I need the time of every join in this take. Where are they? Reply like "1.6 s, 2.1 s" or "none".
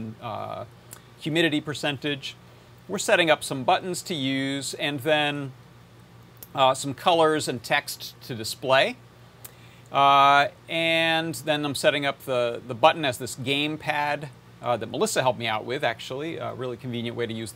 none